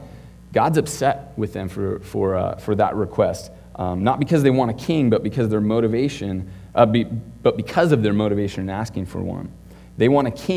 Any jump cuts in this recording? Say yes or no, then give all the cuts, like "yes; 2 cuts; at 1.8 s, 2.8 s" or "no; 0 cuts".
no; 0 cuts